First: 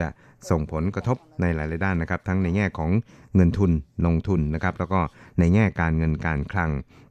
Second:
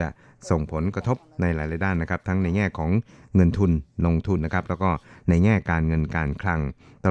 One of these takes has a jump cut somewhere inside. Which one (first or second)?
second